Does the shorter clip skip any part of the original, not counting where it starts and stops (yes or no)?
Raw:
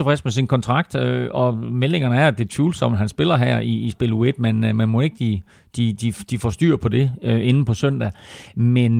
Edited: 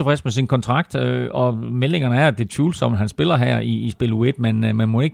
no